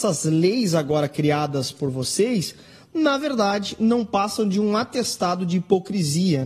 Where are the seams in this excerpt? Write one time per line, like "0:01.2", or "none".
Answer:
none